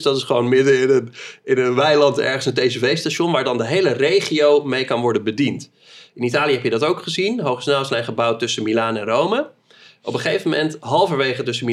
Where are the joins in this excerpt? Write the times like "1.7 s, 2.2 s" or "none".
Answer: none